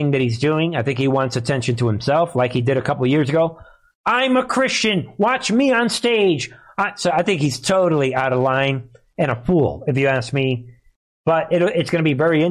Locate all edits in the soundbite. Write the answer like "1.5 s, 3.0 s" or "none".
none